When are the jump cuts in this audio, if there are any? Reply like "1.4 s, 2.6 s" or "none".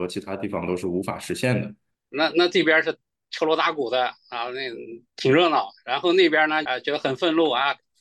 1.9 s, 6.7 s